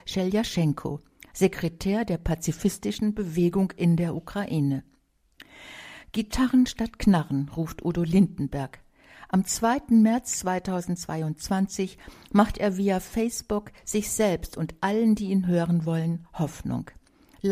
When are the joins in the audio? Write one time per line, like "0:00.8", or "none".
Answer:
none